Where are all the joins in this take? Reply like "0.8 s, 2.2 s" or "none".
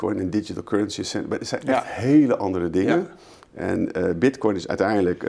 none